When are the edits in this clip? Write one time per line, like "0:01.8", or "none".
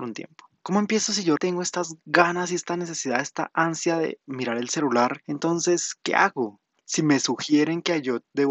0:01.4
0:05.2